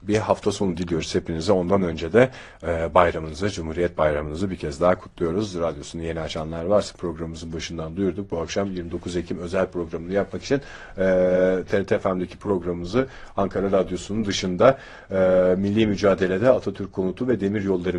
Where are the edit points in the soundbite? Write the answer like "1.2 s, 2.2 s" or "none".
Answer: none

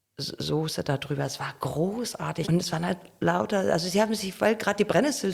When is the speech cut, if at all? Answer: 2.4 s

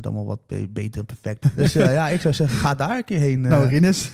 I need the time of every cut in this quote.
1.4 s

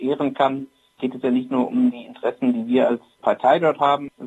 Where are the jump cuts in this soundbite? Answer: none

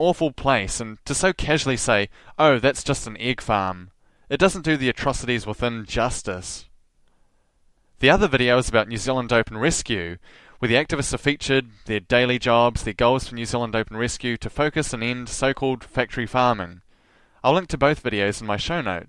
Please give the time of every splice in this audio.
none

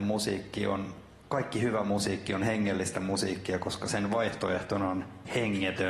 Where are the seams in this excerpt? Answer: none

